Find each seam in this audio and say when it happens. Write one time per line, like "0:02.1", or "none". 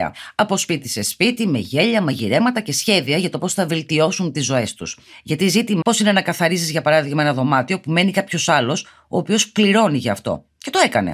0:05.8